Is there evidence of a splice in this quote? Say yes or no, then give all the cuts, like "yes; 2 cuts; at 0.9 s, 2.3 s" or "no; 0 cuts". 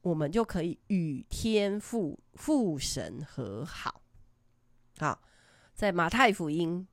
yes; 1 cut; at 5.6 s